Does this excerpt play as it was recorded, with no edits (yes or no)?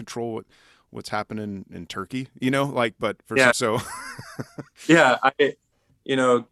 no